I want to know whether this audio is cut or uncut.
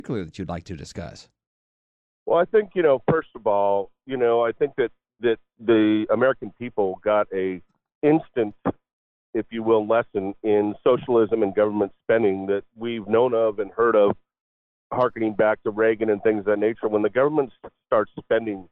uncut